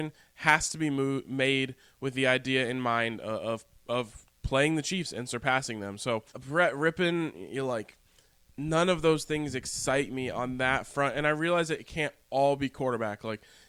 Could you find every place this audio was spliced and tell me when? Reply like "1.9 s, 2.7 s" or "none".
6.3 s

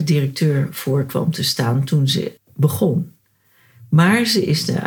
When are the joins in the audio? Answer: 2.4 s

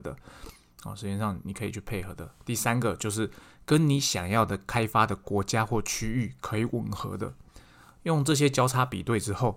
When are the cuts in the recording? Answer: none

